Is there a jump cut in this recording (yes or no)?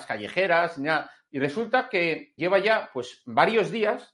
yes